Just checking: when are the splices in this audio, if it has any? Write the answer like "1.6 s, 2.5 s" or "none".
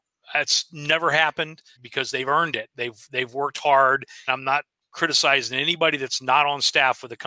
1.8 s, 4.3 s